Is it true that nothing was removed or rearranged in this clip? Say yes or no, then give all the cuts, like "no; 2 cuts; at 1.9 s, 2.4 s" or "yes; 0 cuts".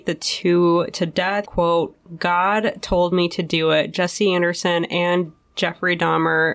no; 1 cut; at 1.5 s